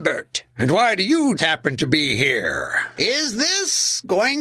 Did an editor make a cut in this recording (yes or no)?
yes